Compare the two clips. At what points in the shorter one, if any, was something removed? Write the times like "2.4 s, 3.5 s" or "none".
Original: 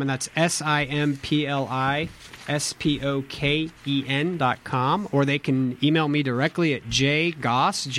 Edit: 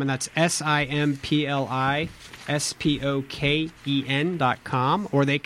none